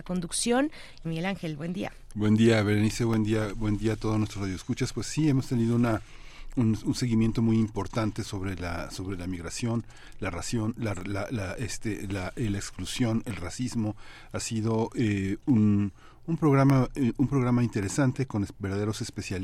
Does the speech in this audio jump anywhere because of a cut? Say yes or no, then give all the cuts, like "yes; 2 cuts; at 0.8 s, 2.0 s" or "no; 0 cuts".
yes; 1 cut; at 1.0 s